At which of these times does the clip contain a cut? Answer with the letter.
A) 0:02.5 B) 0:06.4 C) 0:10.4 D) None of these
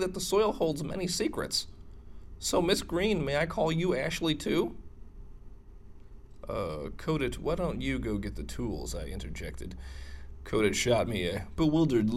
D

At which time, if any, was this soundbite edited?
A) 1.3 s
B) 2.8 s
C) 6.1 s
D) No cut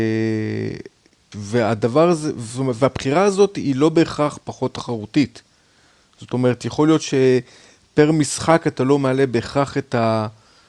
A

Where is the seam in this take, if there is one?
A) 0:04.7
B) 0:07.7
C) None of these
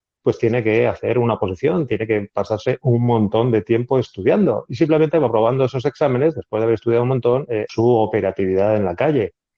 B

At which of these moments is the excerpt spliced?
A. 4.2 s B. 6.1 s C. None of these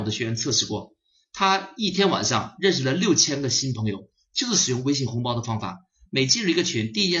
B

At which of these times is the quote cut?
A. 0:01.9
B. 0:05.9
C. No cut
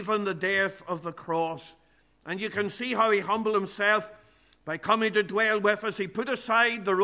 C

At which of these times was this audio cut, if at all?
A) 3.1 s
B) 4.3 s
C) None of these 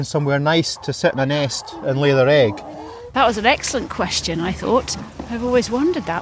A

